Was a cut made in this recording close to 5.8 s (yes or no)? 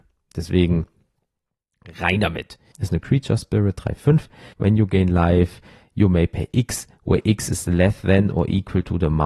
no